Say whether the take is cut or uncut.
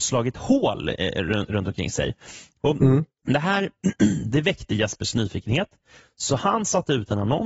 uncut